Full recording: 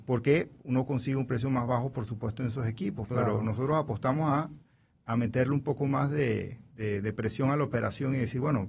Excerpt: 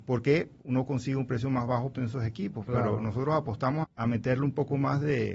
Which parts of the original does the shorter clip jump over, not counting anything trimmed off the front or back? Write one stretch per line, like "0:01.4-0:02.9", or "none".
0:01.9-0:02.4
0:04.2-0:04.9